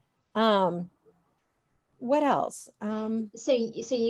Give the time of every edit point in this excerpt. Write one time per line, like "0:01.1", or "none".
0:02.0